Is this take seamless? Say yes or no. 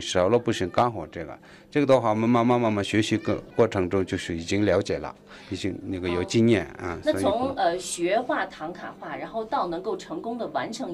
no